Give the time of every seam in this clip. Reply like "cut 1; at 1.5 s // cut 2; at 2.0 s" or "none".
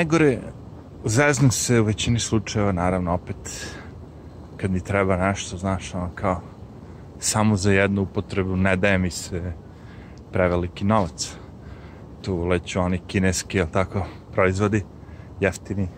none